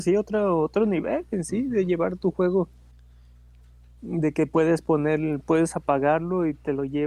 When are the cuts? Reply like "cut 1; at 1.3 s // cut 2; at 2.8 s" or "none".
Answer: none